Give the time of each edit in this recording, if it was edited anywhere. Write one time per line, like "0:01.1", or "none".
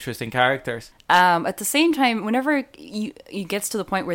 0:00.9